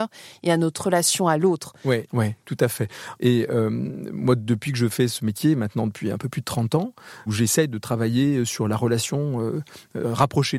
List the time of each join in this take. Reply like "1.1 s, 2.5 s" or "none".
2.1 s, 3.2 s, 7.3 s

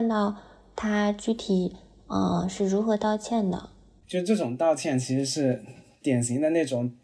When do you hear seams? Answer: 4.0 s

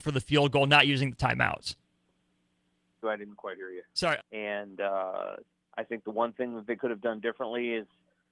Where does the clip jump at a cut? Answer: 3.0 s, 4.2 s

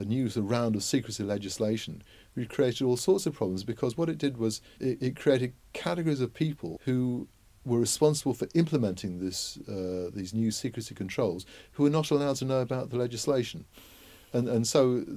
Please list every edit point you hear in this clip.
4.8 s

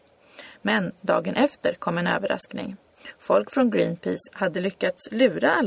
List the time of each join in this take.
none

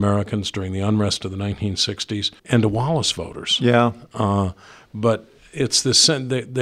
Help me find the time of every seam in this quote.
2.4 s

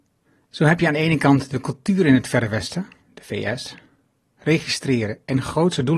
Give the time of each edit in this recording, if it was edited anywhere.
4.4 s

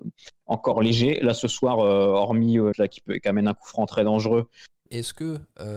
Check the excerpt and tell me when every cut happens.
2.7 s, 4.9 s

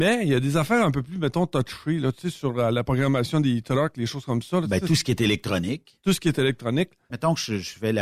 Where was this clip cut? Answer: 7.1 s

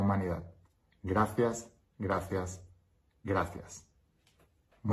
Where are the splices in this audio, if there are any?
none

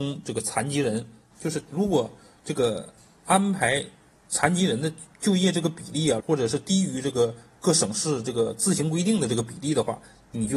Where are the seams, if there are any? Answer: 1.3 s, 5.1 s, 6.2 s

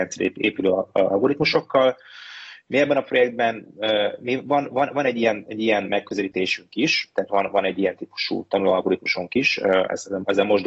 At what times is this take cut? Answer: 7.3 s

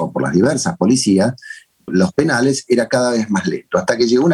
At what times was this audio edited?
1.9 s

